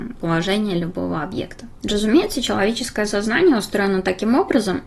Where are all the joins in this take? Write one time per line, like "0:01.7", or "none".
none